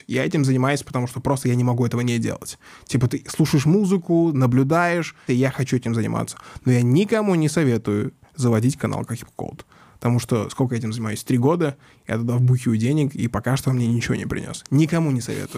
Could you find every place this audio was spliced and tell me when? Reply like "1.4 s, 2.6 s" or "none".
5.3 s